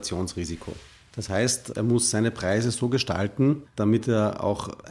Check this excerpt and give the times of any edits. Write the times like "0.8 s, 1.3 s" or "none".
none